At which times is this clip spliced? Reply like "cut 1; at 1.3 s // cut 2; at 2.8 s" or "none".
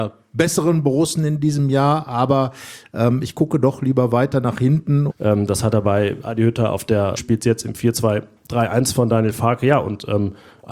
cut 1; at 5.1 s // cut 2; at 7.1 s